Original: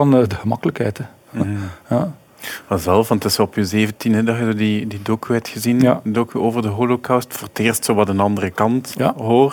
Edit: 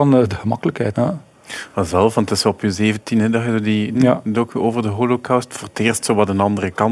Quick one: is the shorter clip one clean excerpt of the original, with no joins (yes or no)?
no